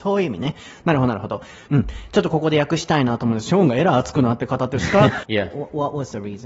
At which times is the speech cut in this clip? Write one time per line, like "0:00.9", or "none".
0:05.2